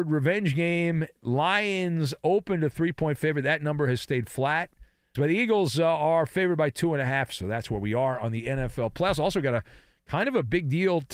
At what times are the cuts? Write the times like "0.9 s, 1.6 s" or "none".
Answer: 5.1 s, 7.3 s